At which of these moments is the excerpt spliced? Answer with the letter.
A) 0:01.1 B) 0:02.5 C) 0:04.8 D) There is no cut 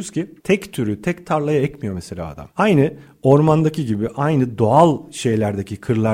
D